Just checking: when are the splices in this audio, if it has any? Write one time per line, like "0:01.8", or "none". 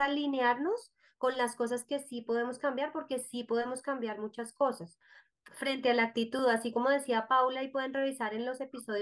none